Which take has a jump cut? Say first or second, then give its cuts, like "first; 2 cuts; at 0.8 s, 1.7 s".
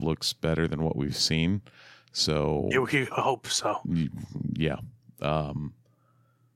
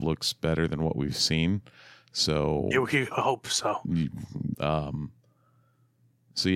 second; 1 cut; at 4.5 s